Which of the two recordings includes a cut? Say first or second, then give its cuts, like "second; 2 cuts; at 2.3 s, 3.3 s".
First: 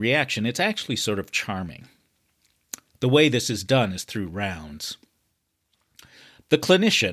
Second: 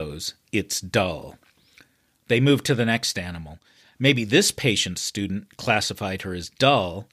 first; 1 cut; at 2.9 s